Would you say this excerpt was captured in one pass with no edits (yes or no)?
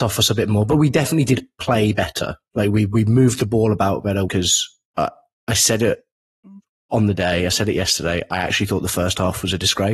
no